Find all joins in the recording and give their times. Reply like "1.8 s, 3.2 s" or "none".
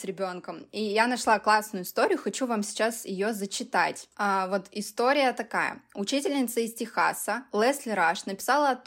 none